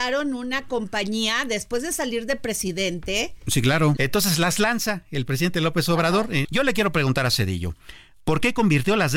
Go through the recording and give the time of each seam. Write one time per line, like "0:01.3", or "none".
0:04.0
0:06.4